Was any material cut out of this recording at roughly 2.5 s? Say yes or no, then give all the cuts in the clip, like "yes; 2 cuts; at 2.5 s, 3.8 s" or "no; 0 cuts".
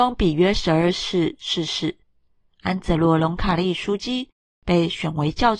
yes; 1 cut; at 2.5 s